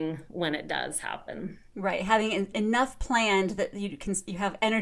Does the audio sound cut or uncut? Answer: uncut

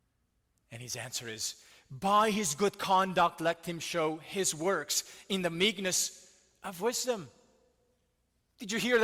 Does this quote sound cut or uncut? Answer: uncut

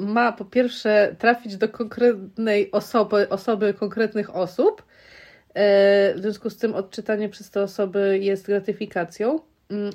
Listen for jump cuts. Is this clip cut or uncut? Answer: uncut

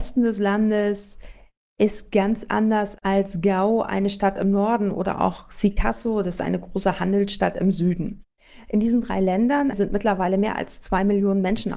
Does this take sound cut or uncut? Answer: cut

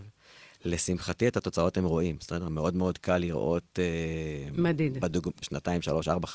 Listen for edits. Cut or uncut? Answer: cut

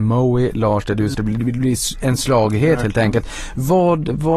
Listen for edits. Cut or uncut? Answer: cut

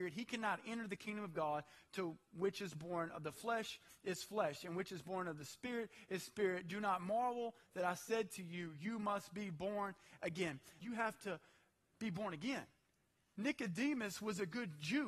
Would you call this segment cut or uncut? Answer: cut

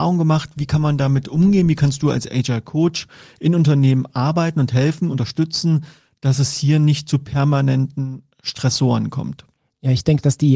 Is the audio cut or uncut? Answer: uncut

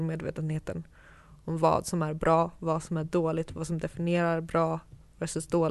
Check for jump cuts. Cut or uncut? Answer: uncut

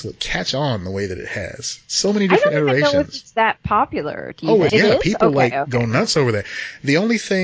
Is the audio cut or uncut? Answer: cut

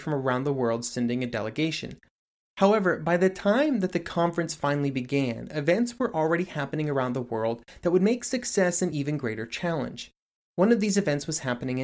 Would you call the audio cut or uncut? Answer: uncut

